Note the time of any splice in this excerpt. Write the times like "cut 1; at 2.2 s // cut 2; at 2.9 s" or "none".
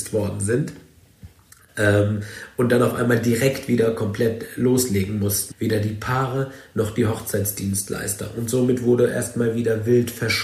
cut 1; at 5.5 s